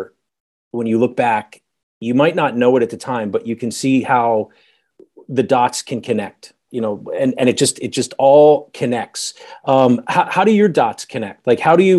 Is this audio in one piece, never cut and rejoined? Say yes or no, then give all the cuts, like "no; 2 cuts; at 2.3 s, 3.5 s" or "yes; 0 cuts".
no; 1 cut; at 6.7 s